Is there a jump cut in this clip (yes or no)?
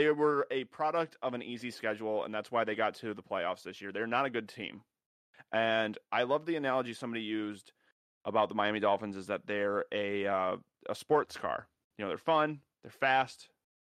no